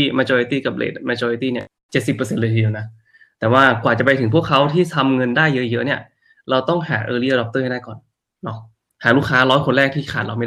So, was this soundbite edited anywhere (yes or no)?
no